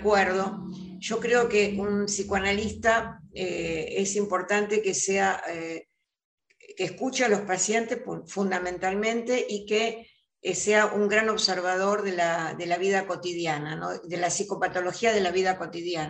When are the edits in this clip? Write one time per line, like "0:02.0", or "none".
none